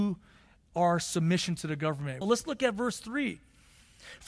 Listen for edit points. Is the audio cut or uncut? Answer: cut